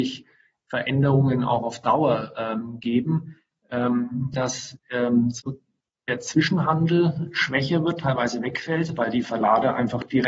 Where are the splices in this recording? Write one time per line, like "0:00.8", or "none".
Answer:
0:04.3